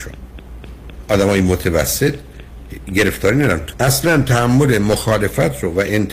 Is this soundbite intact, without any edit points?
no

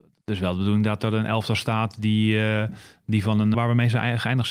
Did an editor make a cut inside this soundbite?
yes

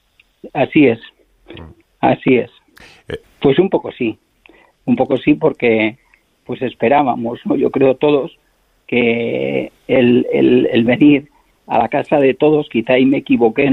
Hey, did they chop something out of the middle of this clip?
yes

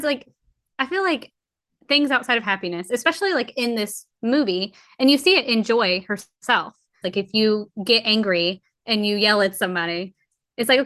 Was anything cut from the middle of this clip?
yes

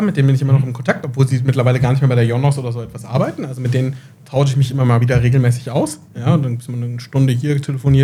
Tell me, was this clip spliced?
no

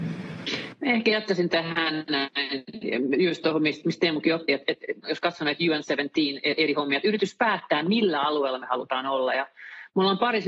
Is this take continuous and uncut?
no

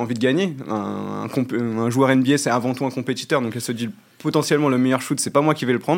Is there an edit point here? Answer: no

